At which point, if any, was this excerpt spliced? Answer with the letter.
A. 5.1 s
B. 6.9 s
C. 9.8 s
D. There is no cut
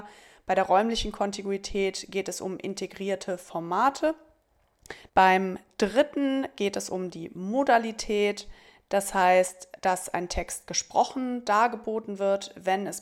A